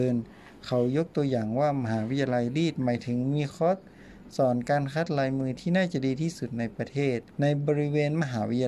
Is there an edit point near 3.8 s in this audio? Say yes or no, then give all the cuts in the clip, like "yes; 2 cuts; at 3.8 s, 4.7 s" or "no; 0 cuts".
no; 1 cut; at 7.3 s